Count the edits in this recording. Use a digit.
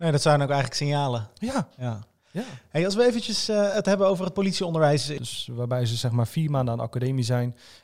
1